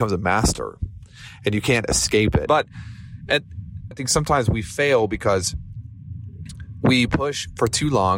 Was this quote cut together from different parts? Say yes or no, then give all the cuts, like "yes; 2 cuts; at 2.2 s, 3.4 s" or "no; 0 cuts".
yes; 2 cuts; at 2.5 s, 3.9 s